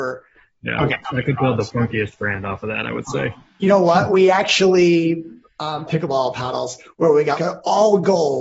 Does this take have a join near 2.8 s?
no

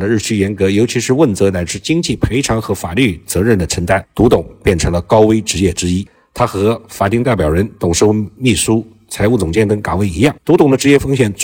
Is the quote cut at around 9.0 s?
no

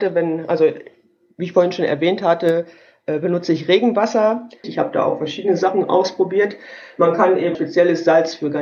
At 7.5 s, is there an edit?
yes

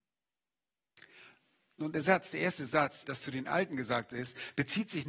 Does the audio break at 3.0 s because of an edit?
yes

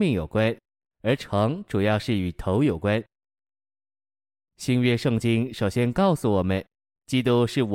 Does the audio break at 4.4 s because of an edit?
yes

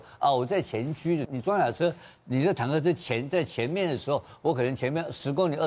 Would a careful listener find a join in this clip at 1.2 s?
yes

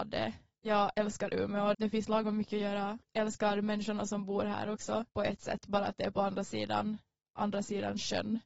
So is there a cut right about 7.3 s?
no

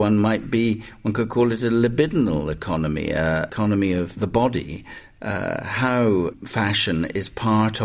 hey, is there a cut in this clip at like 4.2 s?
yes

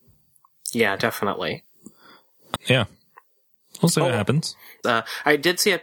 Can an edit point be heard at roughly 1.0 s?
no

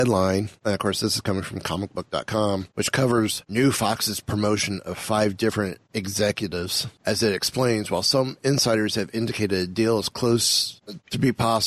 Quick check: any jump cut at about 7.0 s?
yes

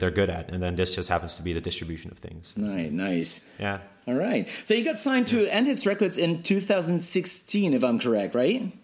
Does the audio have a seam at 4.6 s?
no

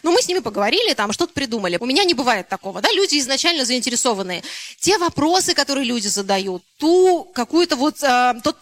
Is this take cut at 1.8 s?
yes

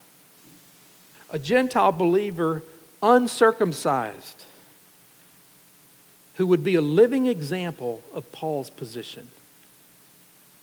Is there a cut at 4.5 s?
no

